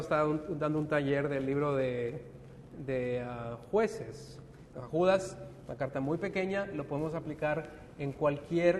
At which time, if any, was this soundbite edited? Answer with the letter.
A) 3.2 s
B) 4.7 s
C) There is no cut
B